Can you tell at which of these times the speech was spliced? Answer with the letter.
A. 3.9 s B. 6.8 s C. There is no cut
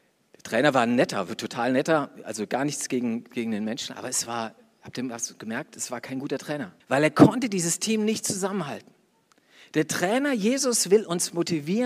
B